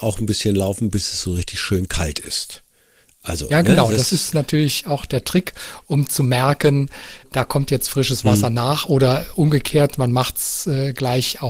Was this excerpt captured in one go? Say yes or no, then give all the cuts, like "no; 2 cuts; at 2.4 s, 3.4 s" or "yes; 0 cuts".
yes; 0 cuts